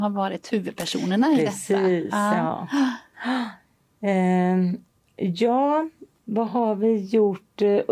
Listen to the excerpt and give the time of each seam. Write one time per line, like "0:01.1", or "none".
none